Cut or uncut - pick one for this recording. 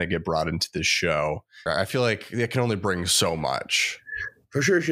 cut